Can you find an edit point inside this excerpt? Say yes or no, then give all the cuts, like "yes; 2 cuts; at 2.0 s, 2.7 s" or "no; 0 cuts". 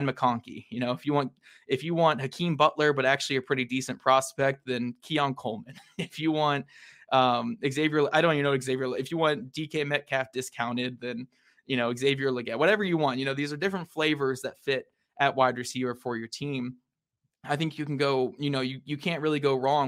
no; 0 cuts